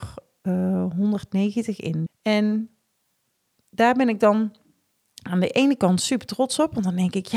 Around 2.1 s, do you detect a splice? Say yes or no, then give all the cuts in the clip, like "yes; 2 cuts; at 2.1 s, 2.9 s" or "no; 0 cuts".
yes; 1 cut; at 2.1 s